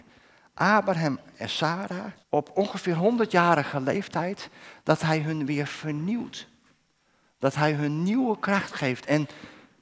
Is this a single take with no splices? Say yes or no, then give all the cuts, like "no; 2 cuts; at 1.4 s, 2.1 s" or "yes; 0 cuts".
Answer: no; 1 cut; at 2.2 s